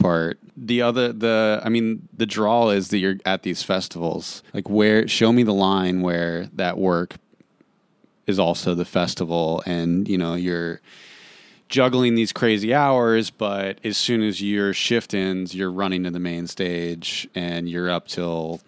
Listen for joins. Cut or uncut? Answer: cut